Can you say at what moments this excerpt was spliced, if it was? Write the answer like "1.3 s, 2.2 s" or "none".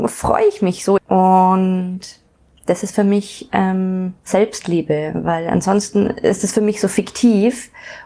1.0 s